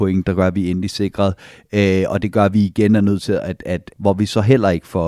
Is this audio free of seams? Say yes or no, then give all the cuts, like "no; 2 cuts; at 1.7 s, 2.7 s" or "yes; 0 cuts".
no; 1 cut; at 3.9 s